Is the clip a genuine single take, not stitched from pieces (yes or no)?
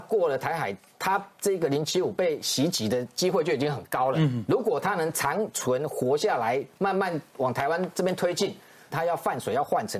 no